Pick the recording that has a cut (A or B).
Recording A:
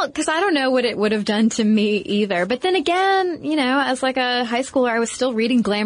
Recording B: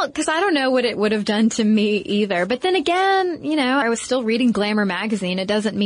B